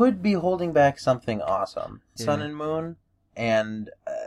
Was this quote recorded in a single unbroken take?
no; 1 cut; at 2.2 s

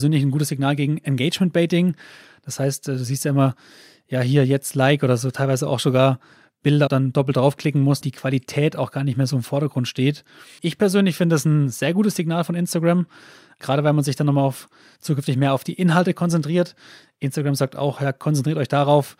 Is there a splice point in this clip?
yes; 3 cuts; at 6.9 s, 8.0 s, 10.6 s

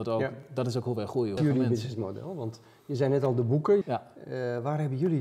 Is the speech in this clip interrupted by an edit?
yes; 2 cuts; at 1.4 s, 3.8 s

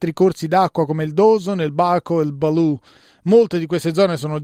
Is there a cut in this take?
no; 0 cuts

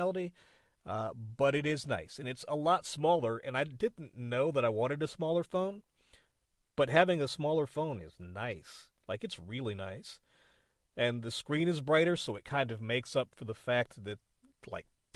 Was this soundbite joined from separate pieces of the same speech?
no; 0 cuts

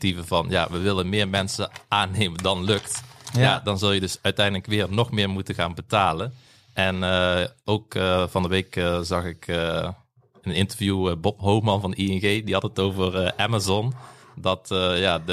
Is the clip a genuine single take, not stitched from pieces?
yes; 0 cuts

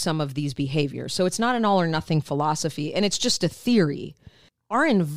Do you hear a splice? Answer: no; 0 cuts

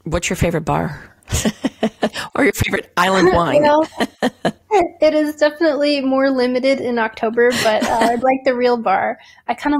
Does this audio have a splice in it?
yes; 1 cut; at 8.2 s

